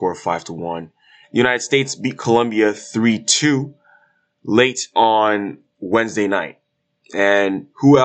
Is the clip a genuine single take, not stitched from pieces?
no; 1 cut; at 1.2 s

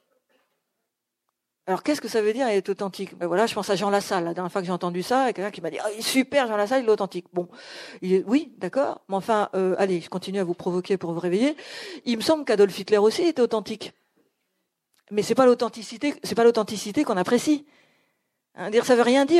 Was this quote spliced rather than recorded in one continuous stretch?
yes; 1 cut; at 3.2 s

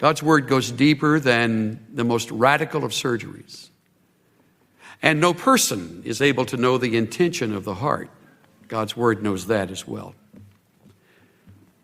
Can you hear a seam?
no; 0 cuts

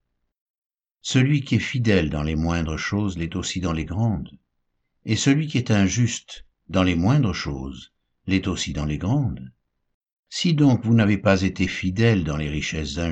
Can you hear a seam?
no; 0 cuts

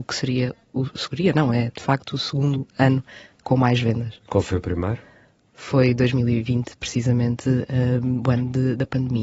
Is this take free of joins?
yes; 0 cuts

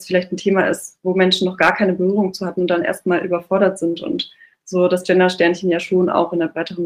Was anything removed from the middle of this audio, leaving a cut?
no; 0 cuts

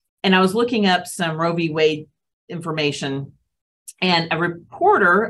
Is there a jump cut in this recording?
no; 0 cuts

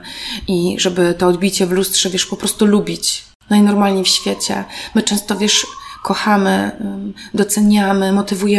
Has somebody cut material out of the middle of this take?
no; 0 cuts

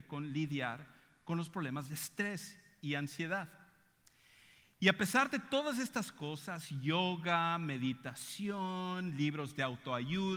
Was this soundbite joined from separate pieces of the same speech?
no; 0 cuts

